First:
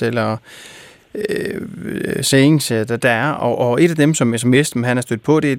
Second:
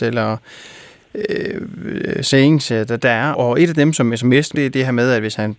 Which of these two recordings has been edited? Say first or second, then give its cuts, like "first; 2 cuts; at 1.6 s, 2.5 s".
second; 2 cuts; at 3.3 s, 4.5 s